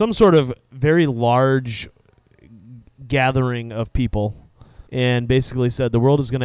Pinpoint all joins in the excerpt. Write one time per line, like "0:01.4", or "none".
0:04.9